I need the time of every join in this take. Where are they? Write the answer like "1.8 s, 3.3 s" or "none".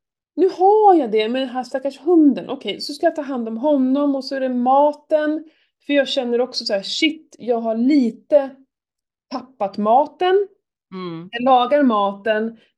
none